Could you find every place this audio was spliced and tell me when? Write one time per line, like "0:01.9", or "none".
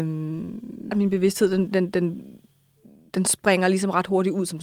0:00.9